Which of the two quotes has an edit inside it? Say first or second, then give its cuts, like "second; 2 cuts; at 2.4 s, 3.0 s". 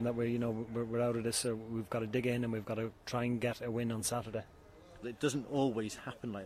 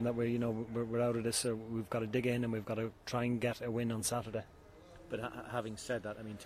first; 1 cut; at 5.0 s